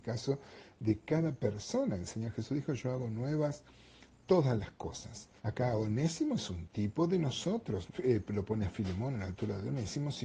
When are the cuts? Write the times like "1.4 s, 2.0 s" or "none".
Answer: 5.4 s, 7.9 s